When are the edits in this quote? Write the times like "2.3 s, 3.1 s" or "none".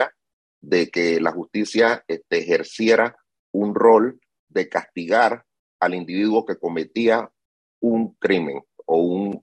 none

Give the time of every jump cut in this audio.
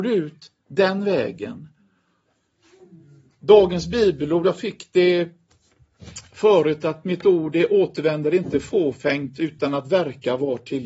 none

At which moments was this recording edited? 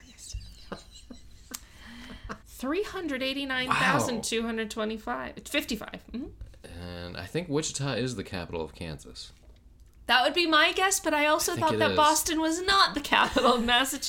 2.4 s

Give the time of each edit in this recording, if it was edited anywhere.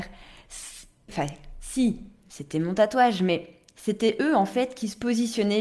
1.1 s

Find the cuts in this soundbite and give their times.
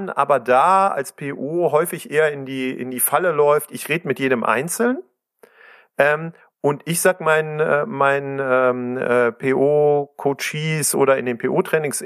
none

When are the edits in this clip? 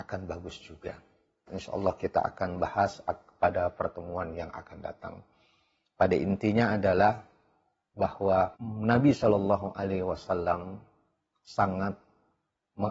1.5 s, 8.6 s

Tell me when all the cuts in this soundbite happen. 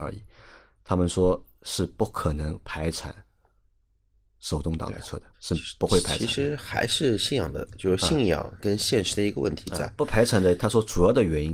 5.3 s

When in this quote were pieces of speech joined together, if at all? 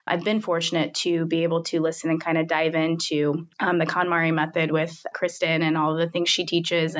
3.5 s, 5.1 s

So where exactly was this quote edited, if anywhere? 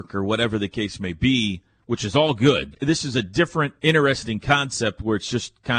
2.7 s, 3.8 s

